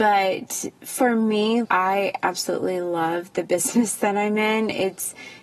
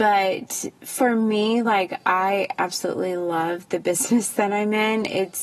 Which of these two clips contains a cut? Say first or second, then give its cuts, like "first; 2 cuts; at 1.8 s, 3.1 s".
first; 1 cut; at 1.6 s